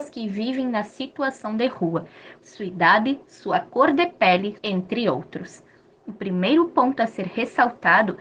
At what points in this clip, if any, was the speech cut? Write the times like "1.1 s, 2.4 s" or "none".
2.4 s, 4.6 s